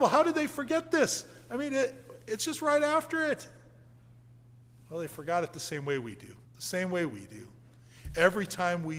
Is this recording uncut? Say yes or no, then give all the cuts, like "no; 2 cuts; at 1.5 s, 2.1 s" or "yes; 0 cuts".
no; 1 cut; at 6.4 s